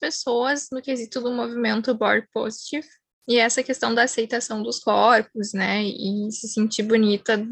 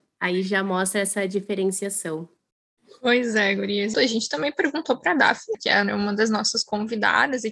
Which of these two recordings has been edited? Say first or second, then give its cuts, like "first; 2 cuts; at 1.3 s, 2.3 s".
second; 2 cuts; at 3.9 s, 5.5 s